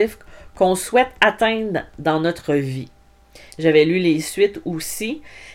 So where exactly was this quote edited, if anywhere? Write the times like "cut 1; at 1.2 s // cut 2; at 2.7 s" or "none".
cut 1; at 3.5 s